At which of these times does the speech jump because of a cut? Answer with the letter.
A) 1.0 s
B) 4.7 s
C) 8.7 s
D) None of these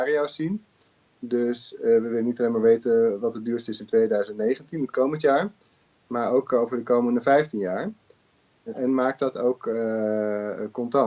D